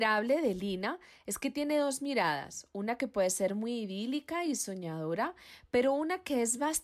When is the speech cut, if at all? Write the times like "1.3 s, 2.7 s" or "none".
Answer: none